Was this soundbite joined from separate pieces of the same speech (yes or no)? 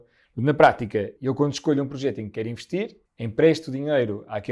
yes